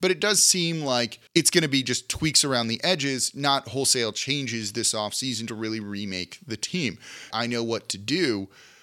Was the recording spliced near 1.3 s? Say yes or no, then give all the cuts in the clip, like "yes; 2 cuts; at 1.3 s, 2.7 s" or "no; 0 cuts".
yes; 2 cuts; at 1.3 s, 7.3 s